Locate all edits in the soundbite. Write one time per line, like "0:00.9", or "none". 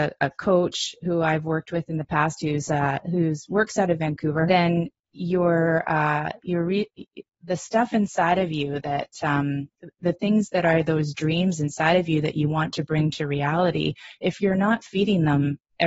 0:04.5